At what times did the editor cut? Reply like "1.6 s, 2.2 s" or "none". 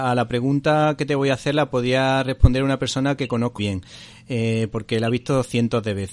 3.6 s